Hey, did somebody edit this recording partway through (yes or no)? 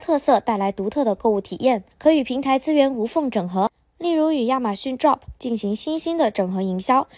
yes